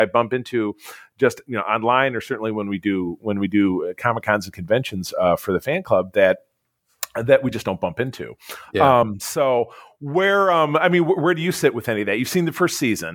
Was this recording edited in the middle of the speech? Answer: no; 0 cuts

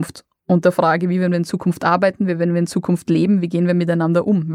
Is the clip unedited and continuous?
yes; 0 cuts

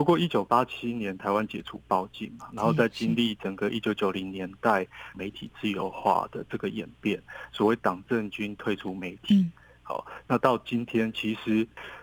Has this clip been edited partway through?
yes; 1 cut; at 5.1 s

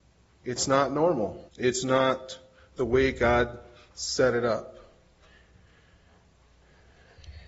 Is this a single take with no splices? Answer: no; 1 cut; at 1.5 s

